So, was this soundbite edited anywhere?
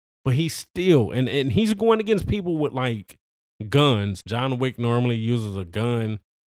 yes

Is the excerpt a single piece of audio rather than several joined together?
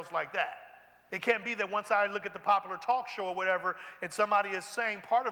no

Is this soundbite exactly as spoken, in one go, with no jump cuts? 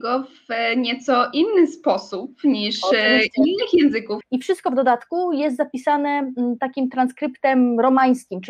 no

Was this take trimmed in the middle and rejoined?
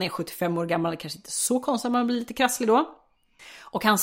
no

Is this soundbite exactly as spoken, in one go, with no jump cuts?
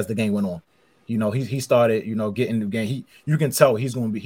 yes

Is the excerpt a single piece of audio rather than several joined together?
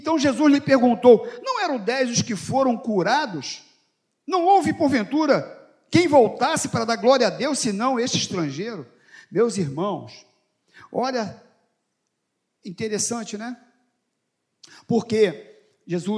no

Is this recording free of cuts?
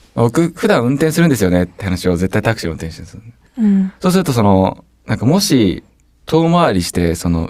yes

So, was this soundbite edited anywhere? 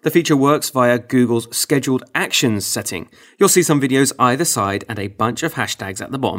yes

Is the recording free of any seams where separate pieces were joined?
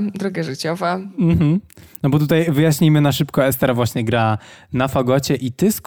yes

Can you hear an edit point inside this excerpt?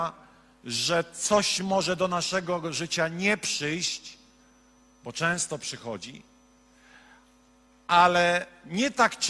no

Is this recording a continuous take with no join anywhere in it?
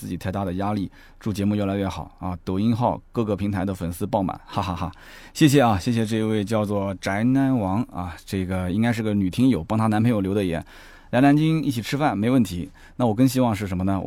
yes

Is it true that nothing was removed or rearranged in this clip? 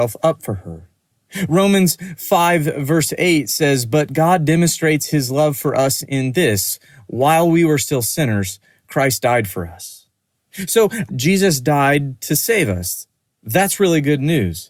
no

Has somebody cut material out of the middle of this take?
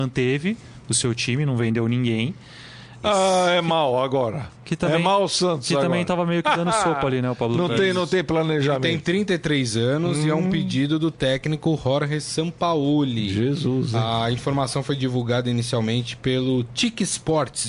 yes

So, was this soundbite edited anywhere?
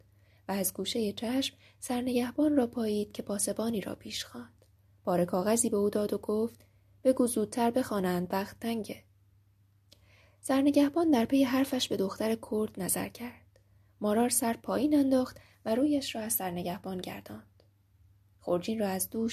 no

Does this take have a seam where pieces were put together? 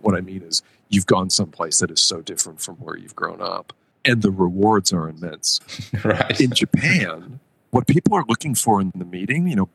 yes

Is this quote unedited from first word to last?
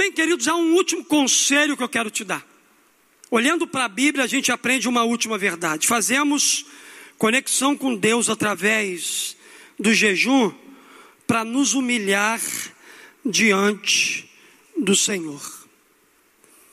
no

